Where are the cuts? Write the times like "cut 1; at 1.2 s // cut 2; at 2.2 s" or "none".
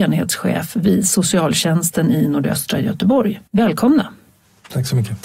cut 1; at 3.5 s